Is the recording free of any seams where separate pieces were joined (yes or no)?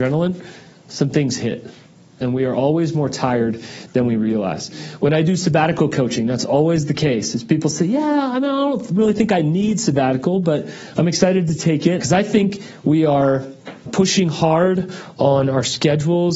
no